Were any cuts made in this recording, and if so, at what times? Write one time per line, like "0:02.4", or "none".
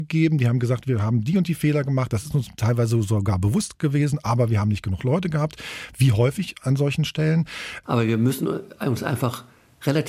0:07.8